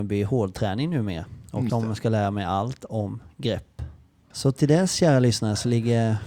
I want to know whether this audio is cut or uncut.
cut